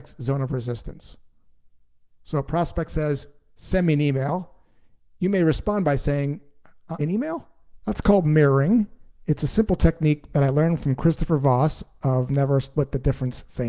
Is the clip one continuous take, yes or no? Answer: no